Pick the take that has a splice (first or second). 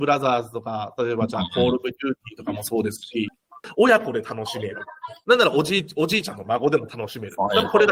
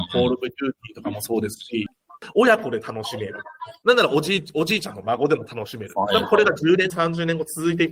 second